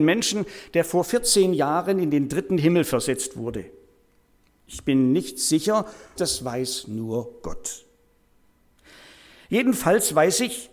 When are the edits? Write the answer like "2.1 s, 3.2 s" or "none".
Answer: 6.2 s